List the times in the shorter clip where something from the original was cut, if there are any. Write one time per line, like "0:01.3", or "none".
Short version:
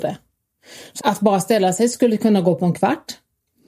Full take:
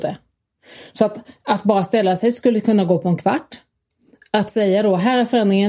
0:01.0